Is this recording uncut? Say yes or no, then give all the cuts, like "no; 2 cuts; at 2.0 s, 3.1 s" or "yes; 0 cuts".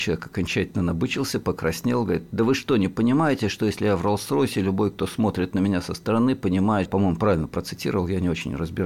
no; 1 cut; at 6.9 s